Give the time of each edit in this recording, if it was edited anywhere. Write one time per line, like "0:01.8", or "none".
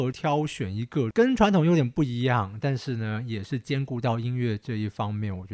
none